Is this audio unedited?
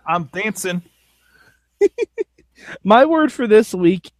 yes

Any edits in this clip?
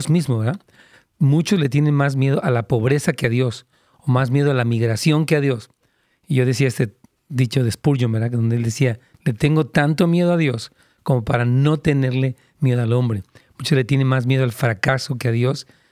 no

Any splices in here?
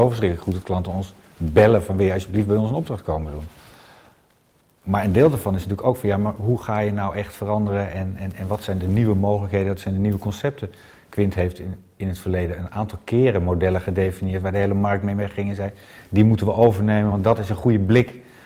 no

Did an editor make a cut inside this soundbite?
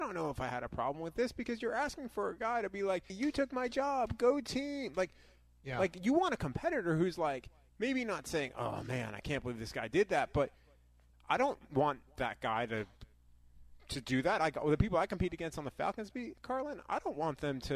yes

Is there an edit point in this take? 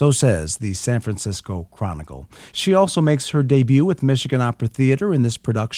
no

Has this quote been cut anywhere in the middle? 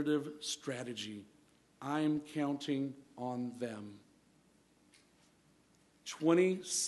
no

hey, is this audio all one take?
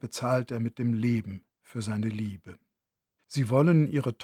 no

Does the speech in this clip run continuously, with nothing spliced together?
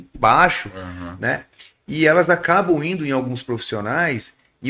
yes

